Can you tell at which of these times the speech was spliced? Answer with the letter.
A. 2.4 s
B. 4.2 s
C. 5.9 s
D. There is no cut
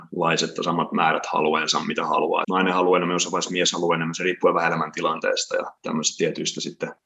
A